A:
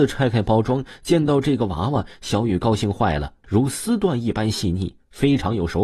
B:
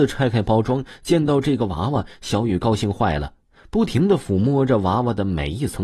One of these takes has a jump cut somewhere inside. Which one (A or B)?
A